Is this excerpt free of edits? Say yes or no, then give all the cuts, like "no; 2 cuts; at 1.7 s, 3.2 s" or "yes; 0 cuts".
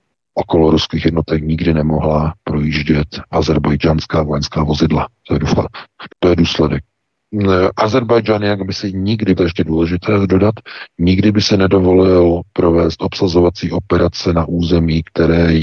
no; 2 cuts; at 6.1 s, 9.4 s